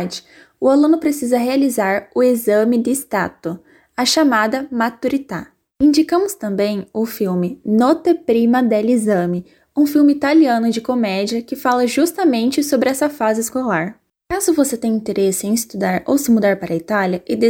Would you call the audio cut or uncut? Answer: uncut